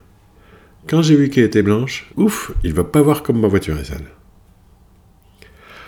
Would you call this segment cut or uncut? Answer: cut